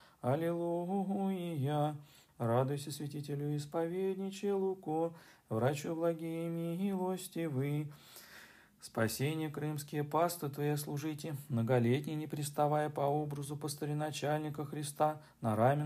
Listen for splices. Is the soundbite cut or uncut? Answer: cut